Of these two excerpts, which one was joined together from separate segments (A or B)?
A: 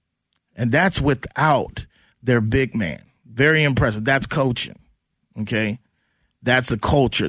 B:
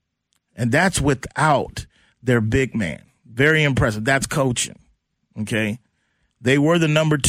B